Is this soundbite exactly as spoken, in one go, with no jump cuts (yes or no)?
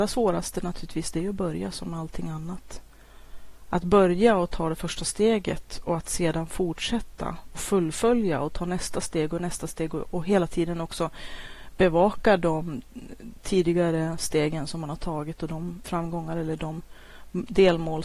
no